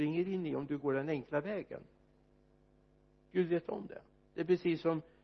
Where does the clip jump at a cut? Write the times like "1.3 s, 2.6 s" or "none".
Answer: none